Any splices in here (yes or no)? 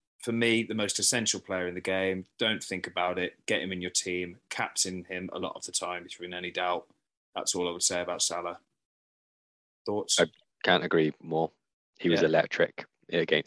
no